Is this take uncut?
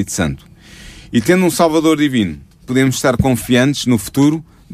yes; 0 cuts

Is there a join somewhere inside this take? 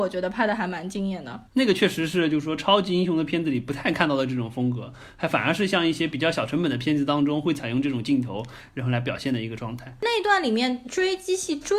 yes; 1 cut; at 1.5 s

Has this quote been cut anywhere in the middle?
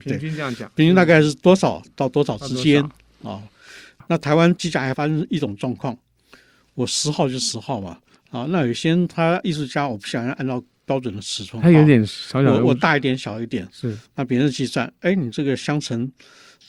no; 0 cuts

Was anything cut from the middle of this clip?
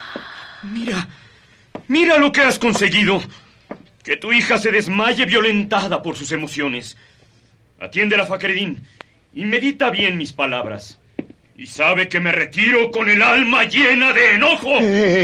no; 0 cuts

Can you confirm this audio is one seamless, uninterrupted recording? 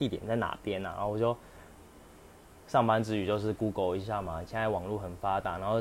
yes; 0 cuts

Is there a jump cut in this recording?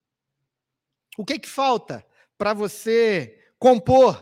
no; 0 cuts

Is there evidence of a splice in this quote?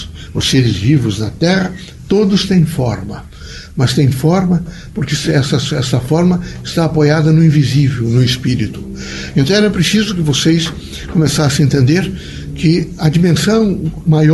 no; 0 cuts

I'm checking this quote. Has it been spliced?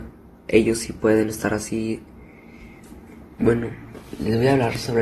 yes; 1 cut; at 3.4 s

